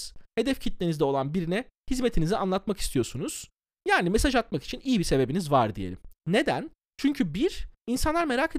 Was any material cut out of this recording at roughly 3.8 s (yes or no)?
no